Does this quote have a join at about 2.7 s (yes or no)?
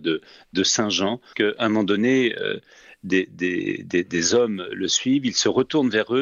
no